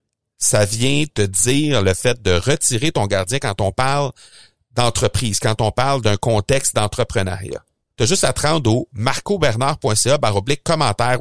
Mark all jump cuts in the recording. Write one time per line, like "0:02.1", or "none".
0:07.9